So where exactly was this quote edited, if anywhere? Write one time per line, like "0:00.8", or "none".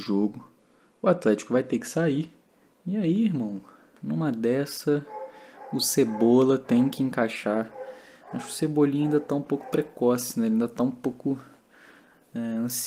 none

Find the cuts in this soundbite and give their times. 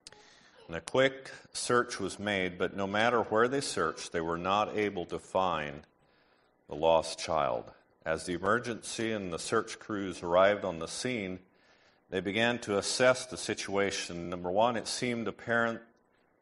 none

